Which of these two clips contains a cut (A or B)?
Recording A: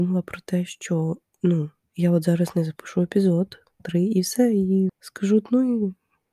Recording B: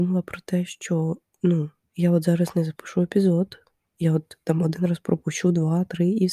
A